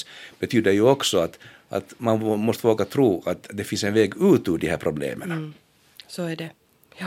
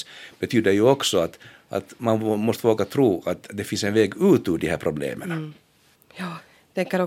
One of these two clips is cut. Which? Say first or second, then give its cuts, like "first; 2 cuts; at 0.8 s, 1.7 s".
second; 1 cut; at 5.9 s